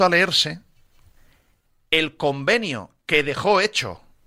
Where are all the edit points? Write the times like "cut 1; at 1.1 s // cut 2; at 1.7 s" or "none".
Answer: none